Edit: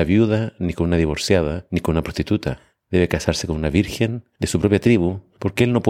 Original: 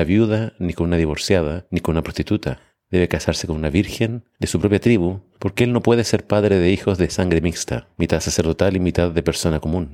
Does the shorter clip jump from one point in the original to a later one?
no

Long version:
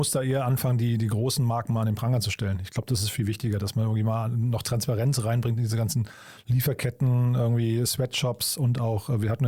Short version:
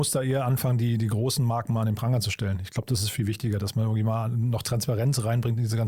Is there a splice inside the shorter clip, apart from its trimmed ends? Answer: no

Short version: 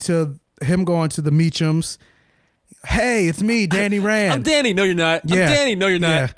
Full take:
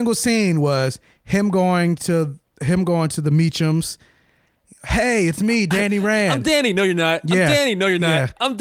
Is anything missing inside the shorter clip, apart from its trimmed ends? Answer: no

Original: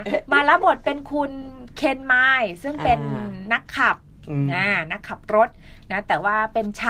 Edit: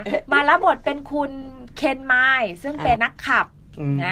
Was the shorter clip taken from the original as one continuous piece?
no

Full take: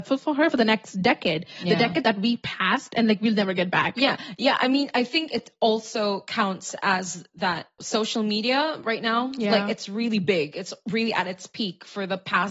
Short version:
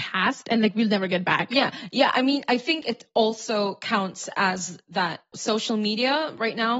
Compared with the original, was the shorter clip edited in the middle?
no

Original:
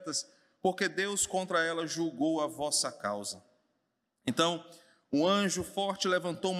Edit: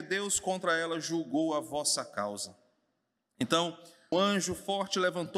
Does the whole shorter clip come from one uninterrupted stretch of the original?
no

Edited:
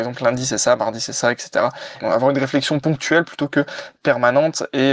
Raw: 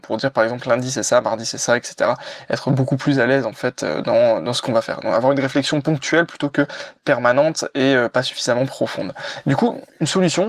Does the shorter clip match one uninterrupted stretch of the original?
no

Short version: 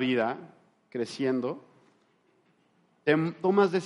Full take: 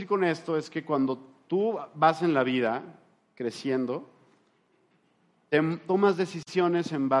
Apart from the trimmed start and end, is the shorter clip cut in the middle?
no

